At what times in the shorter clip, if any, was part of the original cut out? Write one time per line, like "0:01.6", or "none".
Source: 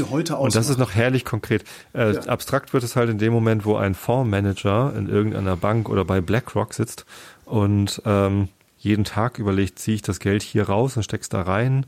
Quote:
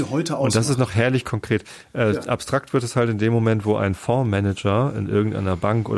none